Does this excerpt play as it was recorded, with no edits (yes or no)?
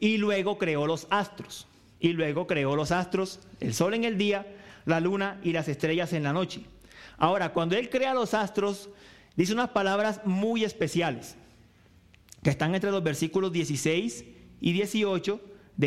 yes